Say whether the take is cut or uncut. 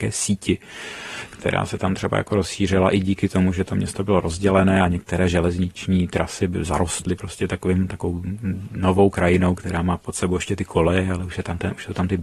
cut